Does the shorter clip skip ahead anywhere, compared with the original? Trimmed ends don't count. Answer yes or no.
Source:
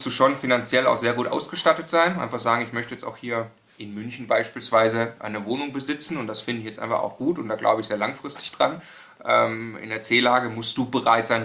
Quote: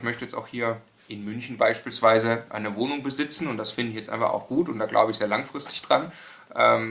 no